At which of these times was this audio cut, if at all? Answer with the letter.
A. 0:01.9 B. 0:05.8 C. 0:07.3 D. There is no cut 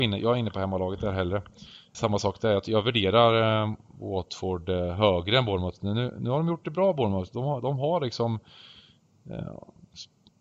A